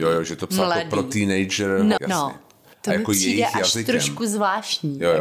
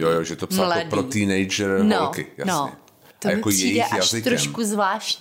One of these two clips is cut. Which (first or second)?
first